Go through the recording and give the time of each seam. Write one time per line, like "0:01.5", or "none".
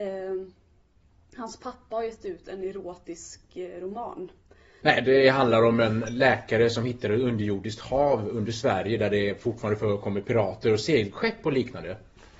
0:04.8